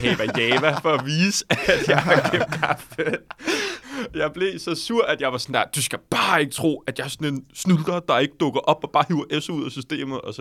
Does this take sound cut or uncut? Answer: uncut